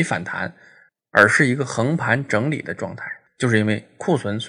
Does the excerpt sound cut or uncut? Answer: uncut